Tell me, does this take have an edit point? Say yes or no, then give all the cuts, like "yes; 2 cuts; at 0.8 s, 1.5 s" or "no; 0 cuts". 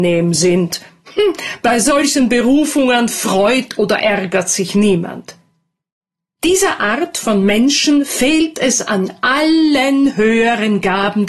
no; 0 cuts